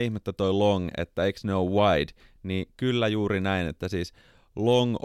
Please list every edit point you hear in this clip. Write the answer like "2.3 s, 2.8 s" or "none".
none